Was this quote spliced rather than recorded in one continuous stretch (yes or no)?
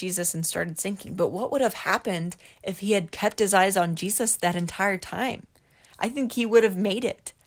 no